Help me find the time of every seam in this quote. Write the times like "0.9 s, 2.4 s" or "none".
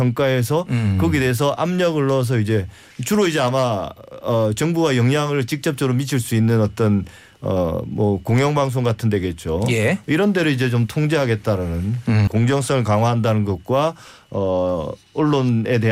12.3 s